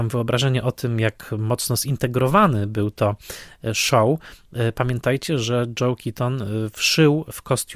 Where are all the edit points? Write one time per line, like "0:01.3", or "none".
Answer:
none